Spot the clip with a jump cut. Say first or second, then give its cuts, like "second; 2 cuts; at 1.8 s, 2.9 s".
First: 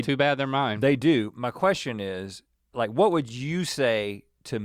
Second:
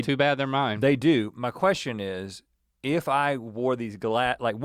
first; 1 cut; at 2.7 s